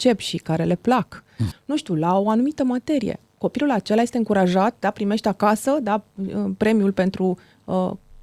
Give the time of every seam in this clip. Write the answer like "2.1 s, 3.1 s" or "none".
1.5 s

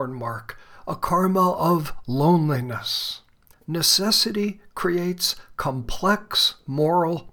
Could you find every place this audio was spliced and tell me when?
3.5 s

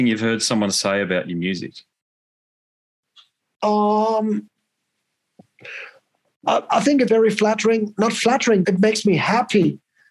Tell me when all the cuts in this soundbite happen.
7.1 s, 8.6 s

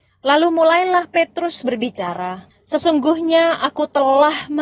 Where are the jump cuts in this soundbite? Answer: 2.5 s

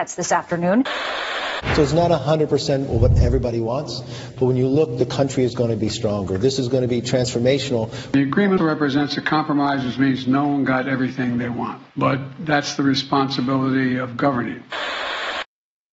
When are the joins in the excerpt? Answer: 8.6 s, 11.9 s

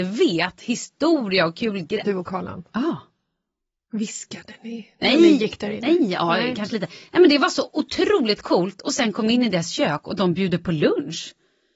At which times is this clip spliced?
2.0 s

